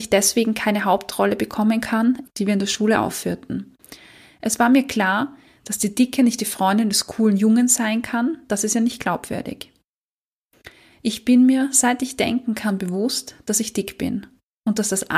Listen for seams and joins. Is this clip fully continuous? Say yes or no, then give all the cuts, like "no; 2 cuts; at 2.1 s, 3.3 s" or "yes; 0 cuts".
no; 2 cuts; at 2.2 s, 10.9 s